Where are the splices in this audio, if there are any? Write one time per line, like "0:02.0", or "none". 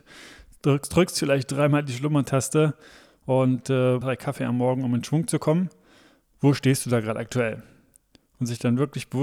0:04.0